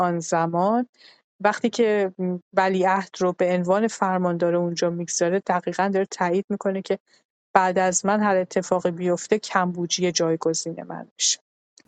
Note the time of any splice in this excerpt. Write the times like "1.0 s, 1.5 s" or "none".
2.4 s